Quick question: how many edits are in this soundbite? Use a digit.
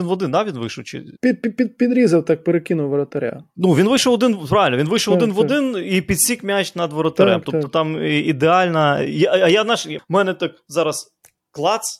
2